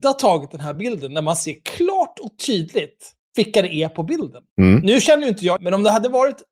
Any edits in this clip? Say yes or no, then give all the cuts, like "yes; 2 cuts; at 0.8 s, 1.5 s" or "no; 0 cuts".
yes; 3 cuts; at 3.2 s, 4.5 s, 5.6 s